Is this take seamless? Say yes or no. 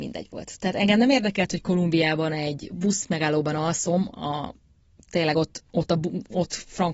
yes